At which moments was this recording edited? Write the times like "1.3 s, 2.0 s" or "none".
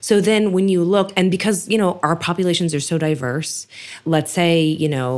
none